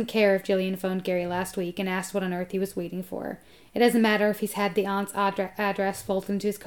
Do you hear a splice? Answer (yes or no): no